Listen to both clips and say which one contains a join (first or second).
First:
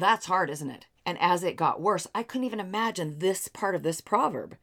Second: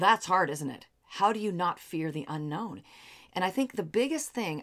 first